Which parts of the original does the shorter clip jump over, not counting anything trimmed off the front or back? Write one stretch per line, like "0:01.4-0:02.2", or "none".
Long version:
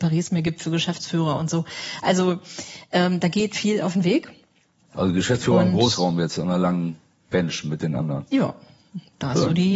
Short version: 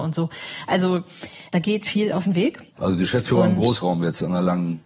0:02.9-0:03.2
0:04.4-0:04.8